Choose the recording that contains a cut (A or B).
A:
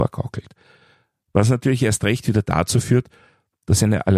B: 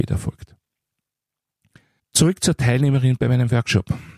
B